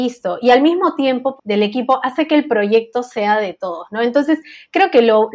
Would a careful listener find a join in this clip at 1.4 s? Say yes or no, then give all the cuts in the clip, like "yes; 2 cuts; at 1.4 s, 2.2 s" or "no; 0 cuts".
yes; 1 cut; at 1.4 s